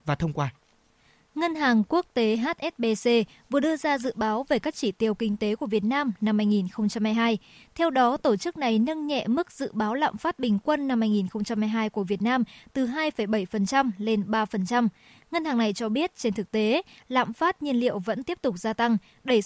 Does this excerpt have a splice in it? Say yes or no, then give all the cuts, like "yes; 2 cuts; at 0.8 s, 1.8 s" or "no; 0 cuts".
no; 0 cuts